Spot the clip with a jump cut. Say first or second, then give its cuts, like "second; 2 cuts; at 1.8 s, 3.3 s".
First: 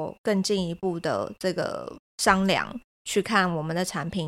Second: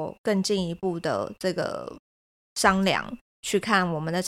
first; 1 cut; at 2.1 s